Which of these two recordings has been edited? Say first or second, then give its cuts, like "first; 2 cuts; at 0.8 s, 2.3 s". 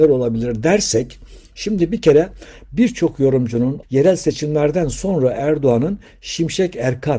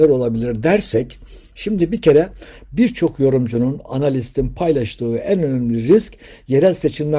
first; 1 cut; at 3.8 s